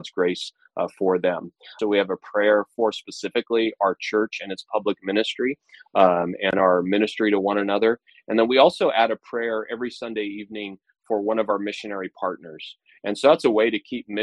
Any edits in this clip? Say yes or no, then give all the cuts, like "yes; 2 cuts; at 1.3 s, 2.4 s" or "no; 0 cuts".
yes; 1 cut; at 1.8 s